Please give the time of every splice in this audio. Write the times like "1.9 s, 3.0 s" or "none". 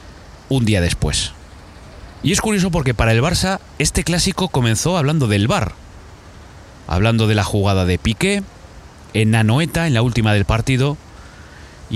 none